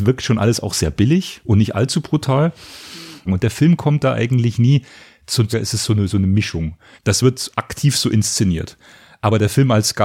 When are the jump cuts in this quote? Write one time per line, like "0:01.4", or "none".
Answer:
0:03.3
0:05.5
0:07.0